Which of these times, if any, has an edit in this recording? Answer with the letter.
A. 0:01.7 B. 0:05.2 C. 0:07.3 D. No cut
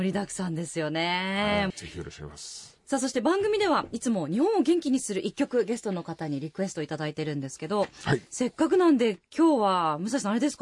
A